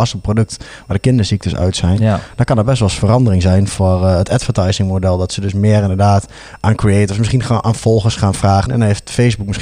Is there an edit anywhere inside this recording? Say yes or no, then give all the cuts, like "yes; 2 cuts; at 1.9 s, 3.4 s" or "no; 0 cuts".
yes; 1 cut; at 8.7 s